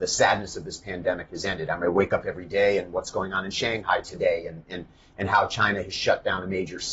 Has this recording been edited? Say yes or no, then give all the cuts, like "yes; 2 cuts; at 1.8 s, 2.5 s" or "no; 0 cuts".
no; 0 cuts